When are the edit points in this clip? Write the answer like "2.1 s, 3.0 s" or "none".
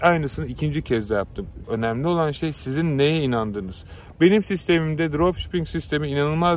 1.6 s